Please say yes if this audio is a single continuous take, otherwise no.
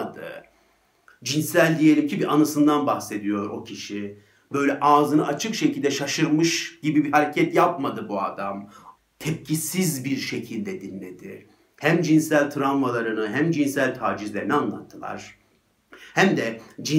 no